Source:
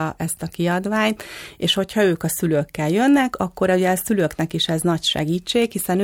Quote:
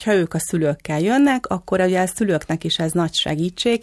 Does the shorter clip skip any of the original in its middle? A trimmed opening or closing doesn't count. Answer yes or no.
no